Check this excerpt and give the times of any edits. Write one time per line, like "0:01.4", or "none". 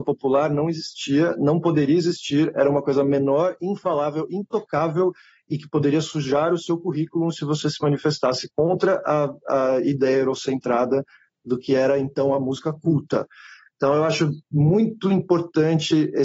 none